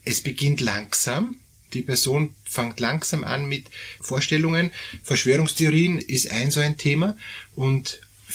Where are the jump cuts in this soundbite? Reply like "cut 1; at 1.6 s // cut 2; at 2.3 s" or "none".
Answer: cut 1; at 4.0 s // cut 2; at 6.0 s

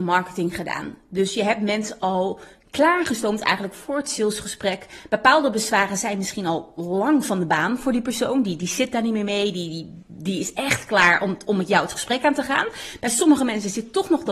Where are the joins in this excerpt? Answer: none

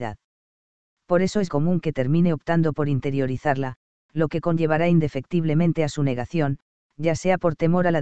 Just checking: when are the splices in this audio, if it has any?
cut 1; at 1.5 s

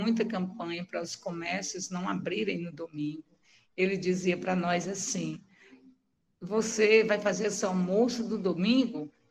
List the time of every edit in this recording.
none

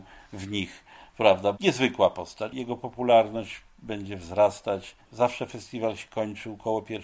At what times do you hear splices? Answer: cut 1; at 1.5 s // cut 2; at 5.0 s

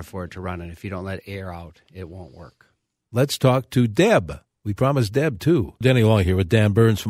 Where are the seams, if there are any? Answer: cut 1; at 3.0 s // cut 2; at 5.8 s

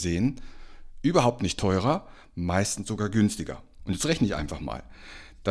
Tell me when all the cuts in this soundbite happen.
cut 1; at 3.8 s

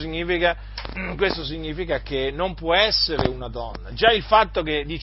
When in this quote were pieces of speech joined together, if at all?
none

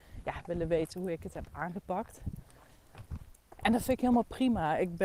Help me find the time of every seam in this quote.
none

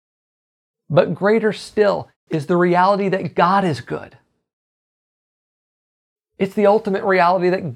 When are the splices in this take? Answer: none

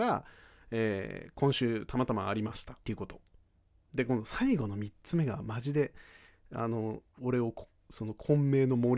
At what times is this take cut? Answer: cut 1; at 2.8 s

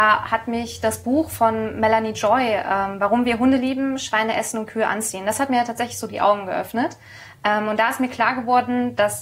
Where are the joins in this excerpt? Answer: none

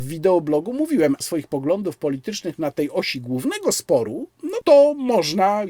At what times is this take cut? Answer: cut 1; at 1.2 s // cut 2; at 4.6 s

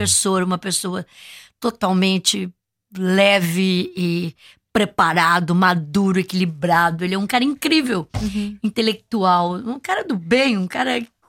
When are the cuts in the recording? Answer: none

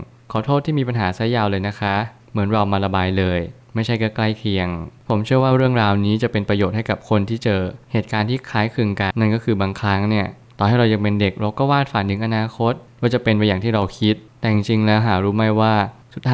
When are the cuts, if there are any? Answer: cut 1; at 9.1 s

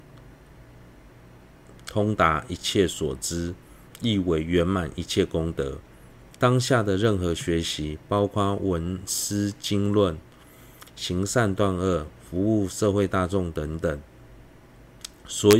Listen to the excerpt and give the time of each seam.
cut 1; at 6.4 s

